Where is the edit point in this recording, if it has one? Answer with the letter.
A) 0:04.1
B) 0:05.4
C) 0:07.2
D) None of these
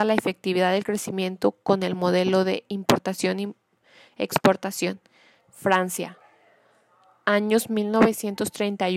B